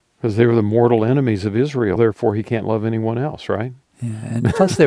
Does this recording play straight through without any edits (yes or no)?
no